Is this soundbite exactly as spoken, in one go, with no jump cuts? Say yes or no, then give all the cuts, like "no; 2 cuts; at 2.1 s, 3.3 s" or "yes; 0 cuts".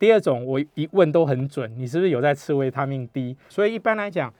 no; 1 cut; at 3.5 s